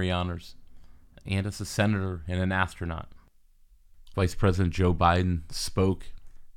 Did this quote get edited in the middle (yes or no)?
yes